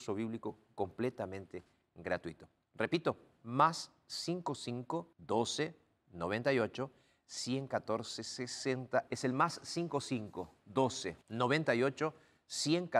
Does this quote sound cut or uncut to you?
cut